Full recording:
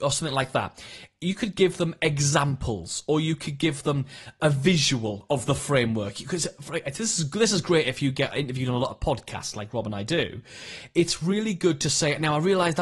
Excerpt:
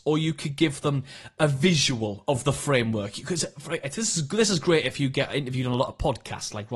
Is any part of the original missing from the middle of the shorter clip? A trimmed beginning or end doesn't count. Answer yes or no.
no